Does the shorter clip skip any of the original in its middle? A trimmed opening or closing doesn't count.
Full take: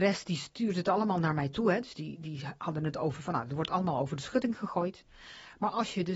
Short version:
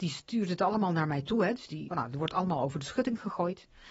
yes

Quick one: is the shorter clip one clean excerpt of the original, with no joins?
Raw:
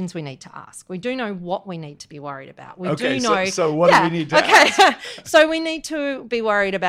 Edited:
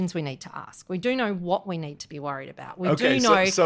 yes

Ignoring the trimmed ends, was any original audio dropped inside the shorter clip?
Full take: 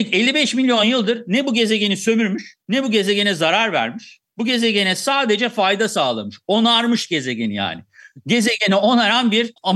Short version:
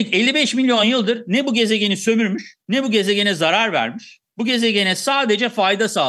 no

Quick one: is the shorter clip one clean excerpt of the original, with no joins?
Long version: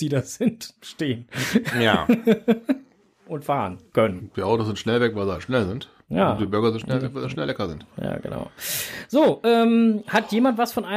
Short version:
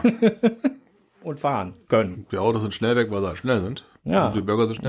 yes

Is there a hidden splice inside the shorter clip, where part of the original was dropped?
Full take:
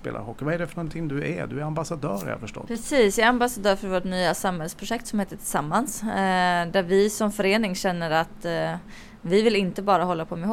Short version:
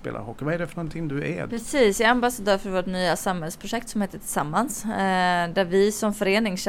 yes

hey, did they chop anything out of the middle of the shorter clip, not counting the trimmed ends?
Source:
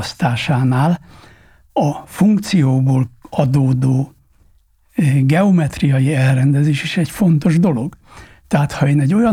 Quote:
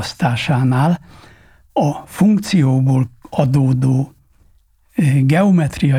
no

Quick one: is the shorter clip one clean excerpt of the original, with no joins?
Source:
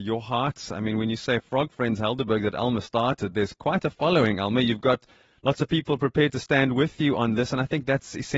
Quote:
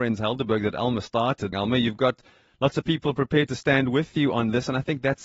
no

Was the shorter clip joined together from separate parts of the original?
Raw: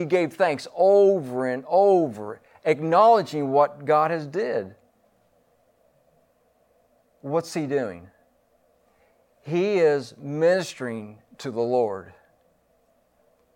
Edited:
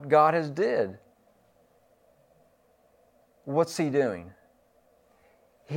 no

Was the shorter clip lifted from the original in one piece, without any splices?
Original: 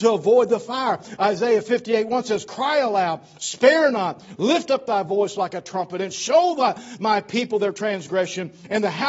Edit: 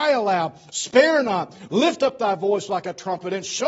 yes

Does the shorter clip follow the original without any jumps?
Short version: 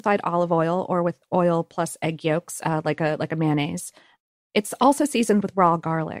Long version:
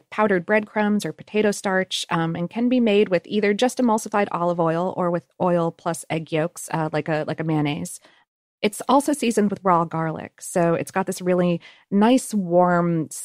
yes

